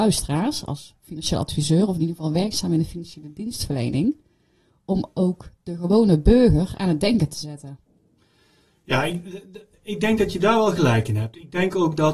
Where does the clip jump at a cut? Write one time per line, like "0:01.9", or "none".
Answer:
none